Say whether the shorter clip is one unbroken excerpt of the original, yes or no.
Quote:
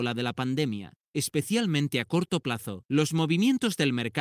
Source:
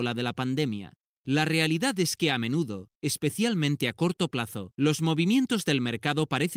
no